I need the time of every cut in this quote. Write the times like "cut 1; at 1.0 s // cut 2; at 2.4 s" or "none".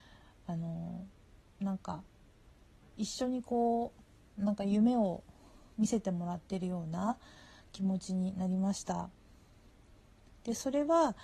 none